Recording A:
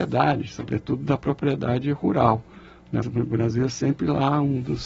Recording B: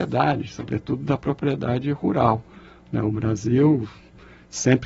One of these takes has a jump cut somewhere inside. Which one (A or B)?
A